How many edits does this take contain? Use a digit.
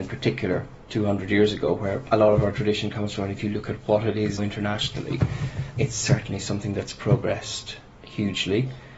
2